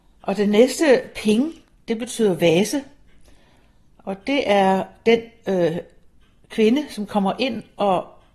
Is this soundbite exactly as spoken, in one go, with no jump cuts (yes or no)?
yes